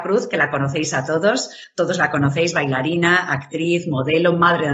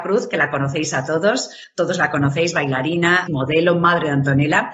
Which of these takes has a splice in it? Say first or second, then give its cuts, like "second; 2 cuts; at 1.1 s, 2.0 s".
second; 1 cut; at 3.3 s